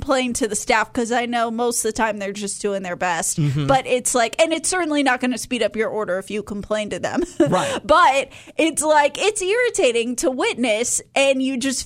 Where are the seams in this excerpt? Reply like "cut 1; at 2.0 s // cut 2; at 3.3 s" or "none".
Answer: none